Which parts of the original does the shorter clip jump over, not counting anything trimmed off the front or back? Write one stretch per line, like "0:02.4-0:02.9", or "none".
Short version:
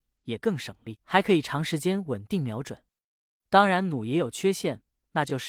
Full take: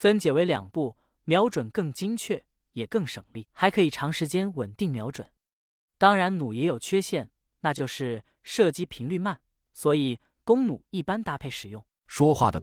none